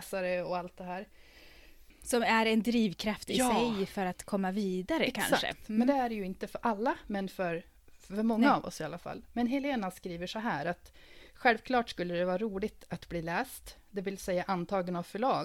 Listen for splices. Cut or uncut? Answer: uncut